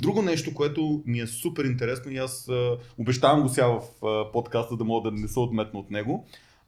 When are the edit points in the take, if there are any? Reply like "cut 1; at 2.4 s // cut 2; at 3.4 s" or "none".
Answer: none